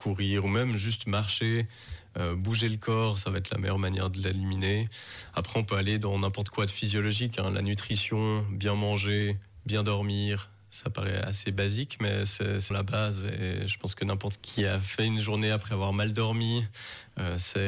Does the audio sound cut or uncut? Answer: cut